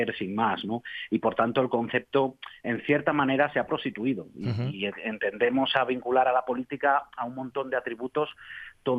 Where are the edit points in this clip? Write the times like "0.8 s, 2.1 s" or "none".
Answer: none

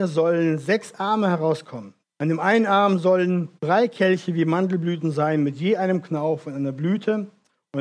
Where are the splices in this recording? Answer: 2.0 s, 3.6 s

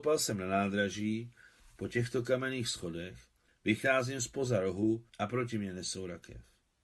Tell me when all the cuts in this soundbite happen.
3.5 s, 5.1 s

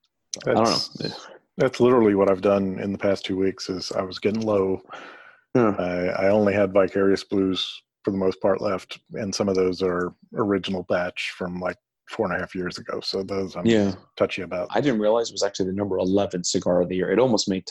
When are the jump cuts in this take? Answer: 14.7 s

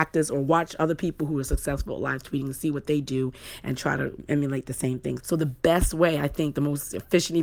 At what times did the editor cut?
5.2 s

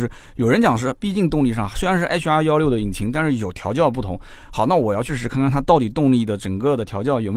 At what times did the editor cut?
5.1 s

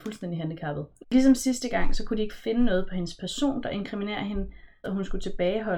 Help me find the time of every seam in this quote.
1.0 s, 4.8 s

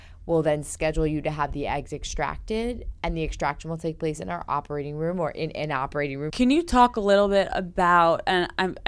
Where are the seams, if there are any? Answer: 6.3 s

